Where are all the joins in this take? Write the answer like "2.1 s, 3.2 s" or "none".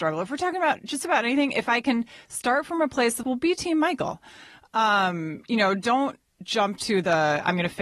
3.2 s